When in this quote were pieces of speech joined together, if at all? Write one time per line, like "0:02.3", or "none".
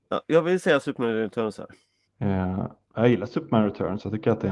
0:02.1